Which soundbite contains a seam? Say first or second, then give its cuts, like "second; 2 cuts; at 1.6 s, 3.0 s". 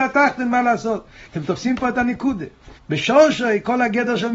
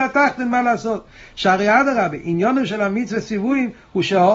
first; 2 cuts; at 1.3 s, 2.8 s